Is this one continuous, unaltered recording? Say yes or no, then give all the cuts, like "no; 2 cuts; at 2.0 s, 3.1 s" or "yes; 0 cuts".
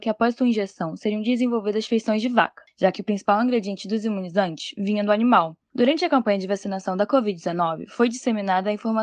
yes; 0 cuts